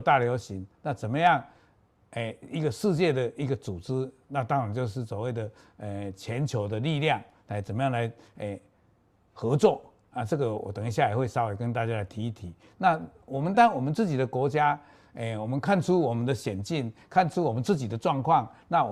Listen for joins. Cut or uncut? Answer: cut